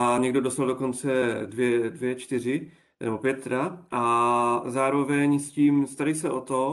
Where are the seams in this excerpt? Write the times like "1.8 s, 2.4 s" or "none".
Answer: none